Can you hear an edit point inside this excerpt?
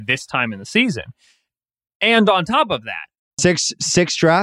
yes; 1 cut; at 3.4 s

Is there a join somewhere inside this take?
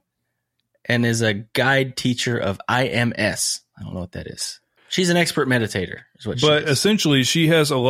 yes; 1 cut; at 4.8 s

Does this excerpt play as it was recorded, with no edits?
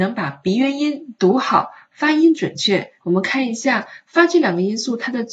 no; 1 cut; at 3.0 s

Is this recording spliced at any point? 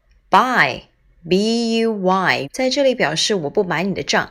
yes; 1 cut; at 2.4 s

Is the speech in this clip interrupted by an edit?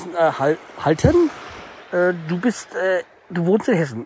no; 0 cuts

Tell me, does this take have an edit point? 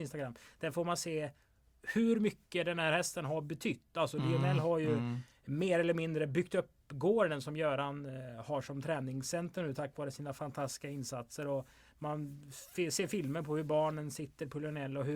no; 0 cuts

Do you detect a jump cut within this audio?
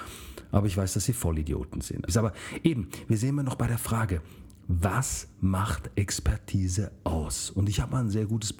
yes; 1 cut; at 2.1 s

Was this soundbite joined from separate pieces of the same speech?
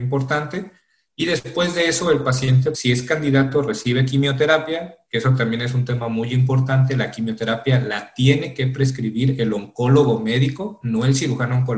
yes; 1 cut; at 2.7 s

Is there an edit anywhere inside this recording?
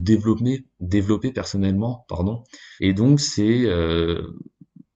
yes; 1 cut; at 2.8 s

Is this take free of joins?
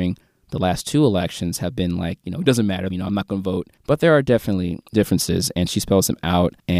no; 1 cut; at 2.9 s

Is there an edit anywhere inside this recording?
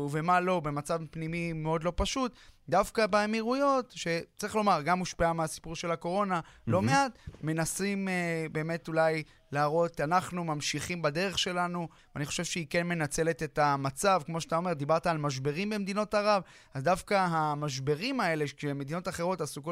yes; 1 cut; at 12.0 s

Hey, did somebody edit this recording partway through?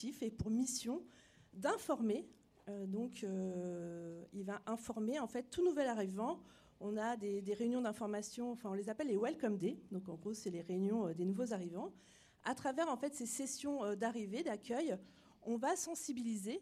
no; 0 cuts

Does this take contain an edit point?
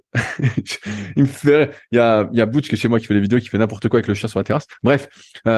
no; 0 cuts

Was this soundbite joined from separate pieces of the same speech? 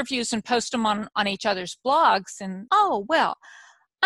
yes; 1 cut; at 2.7 s

